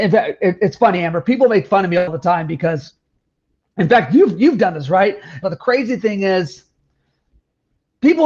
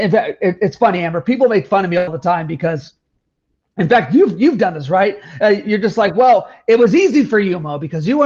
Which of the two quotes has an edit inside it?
first; 1 cut; at 5.4 s

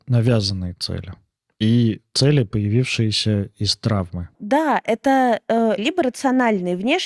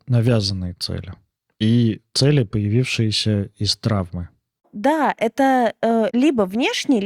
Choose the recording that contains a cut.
first; 2 cuts; at 4.3 s, 5.8 s

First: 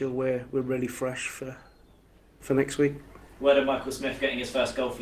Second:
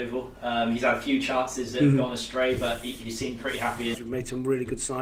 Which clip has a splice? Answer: second; 1 cut; at 3.9 s

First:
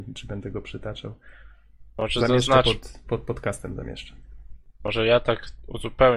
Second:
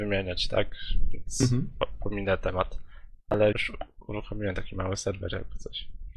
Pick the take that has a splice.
second; 1 cut; at 3.5 s

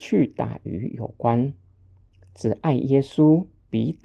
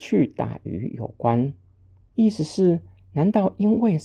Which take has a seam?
second; 1 cut; at 2.1 s

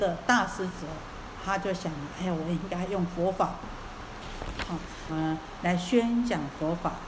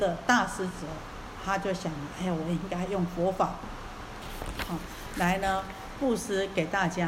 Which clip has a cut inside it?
first; 1 cut; at 5.1 s

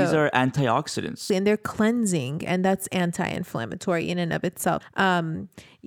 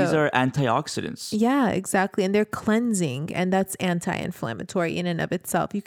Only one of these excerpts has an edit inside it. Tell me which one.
first; 2 cuts; at 1.3 s, 4.8 s

